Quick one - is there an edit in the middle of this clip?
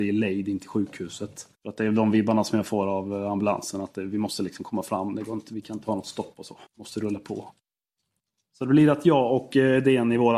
yes; 2 cuts; at 1.5 s, 6.7 s

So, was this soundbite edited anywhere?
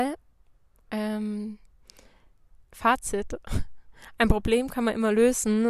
no; 0 cuts

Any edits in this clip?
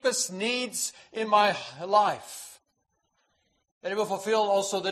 no; 0 cuts

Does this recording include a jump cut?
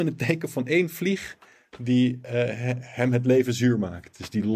no; 0 cuts

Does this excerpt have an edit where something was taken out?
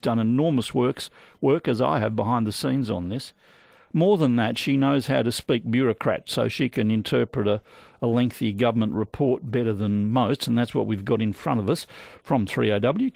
no; 0 cuts

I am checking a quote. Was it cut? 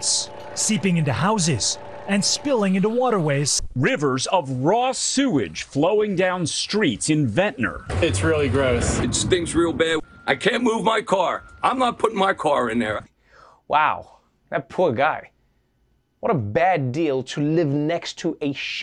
yes; 1 cut; at 13.1 s

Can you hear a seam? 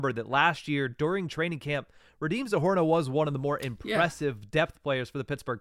no; 0 cuts

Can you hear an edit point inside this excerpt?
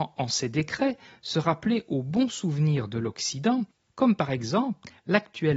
no; 0 cuts

